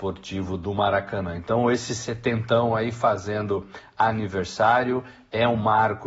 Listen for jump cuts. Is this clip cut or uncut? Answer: uncut